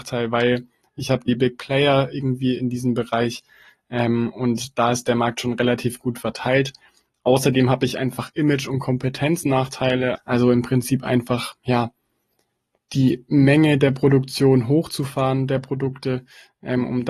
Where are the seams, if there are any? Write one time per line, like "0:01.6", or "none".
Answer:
0:01.3
0:10.1